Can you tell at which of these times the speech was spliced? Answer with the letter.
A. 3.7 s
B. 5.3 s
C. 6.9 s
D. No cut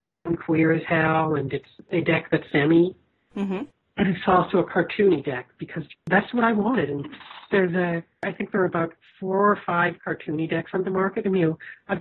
D